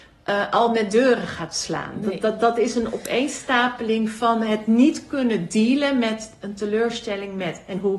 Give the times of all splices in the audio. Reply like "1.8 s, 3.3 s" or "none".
none